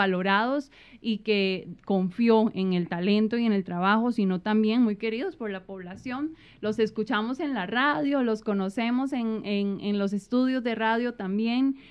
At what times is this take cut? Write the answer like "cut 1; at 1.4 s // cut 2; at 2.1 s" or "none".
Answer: none